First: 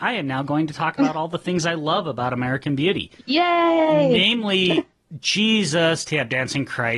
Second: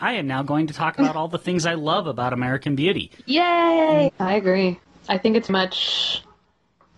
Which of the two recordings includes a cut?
second; 2 cuts; at 4.1 s, 5.5 s

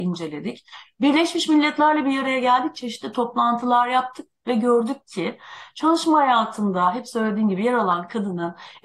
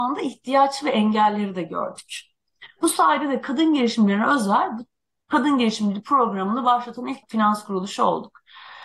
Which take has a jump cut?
second; 1 cut; at 7.2 s

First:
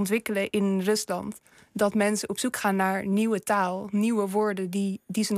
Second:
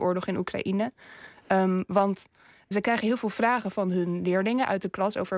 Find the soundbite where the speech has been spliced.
second; 1 cut; at 2.7 s

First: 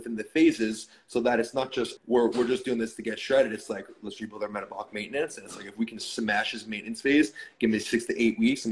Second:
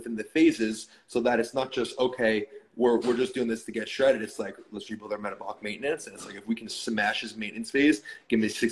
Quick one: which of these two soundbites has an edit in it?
first; 1 cut; at 2.0 s

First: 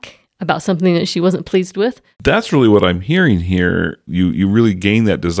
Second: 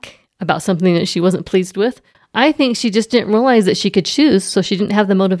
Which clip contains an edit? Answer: first; 2 cuts; at 2.1 s, 4.1 s

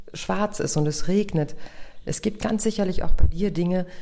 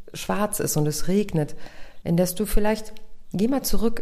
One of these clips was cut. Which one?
second; 1 cut; at 2.0 s

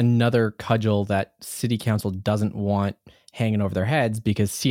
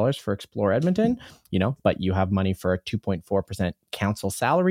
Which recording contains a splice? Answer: second; 1 cut; at 1.8 s

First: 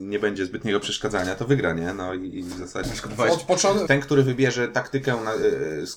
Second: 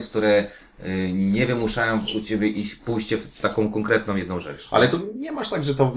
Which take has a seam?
first; 2 cuts; at 2.8 s, 3.9 s

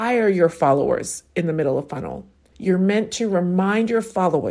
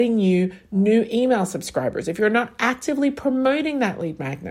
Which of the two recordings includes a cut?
first; 1 cut; at 2.5 s

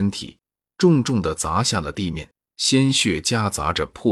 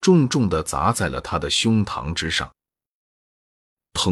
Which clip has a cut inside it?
first; 1 cut; at 2.4 s

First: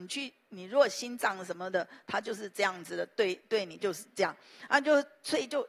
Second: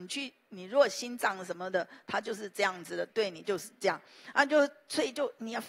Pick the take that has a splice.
second; 1 cut; at 3.1 s

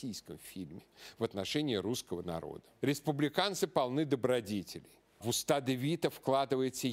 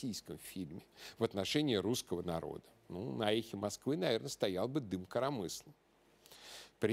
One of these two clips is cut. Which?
first; 1 cut; at 2.8 s

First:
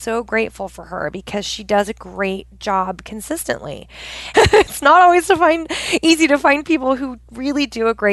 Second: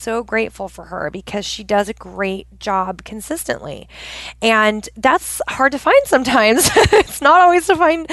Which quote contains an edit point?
first; 1 cut; at 4.3 s

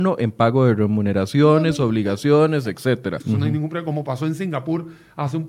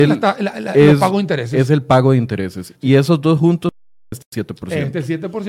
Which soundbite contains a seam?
first; 1 cut; at 3.2 s

